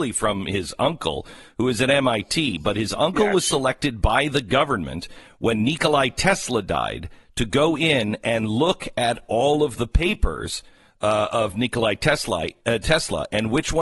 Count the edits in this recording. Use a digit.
0